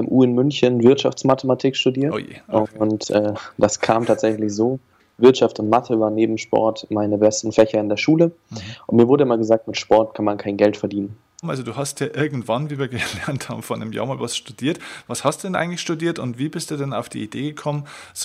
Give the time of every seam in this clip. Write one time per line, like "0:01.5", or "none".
0:11.4

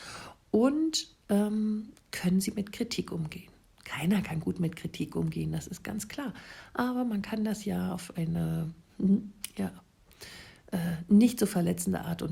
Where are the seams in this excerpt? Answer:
none

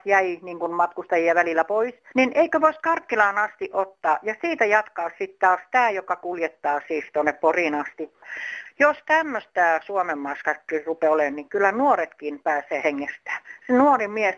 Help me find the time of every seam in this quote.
none

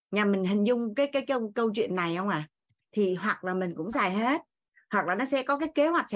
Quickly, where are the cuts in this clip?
0:01.1
0:02.8

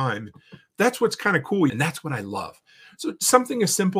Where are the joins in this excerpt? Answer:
0:01.7

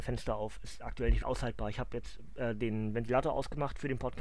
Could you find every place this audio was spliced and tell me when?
0:01.2

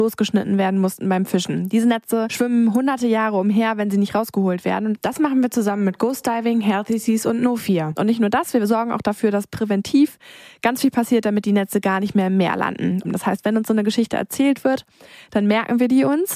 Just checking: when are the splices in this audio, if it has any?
0:07.9
0:13.0

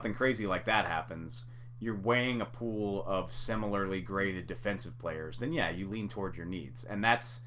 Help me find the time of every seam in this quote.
none

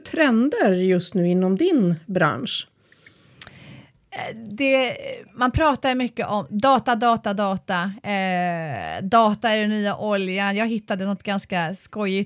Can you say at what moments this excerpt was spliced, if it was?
none

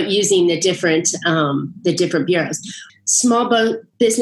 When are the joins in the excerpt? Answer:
0:02.9

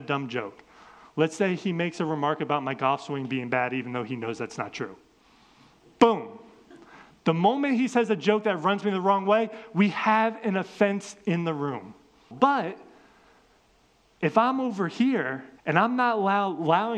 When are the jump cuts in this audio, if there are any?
0:12.3
0:15.6

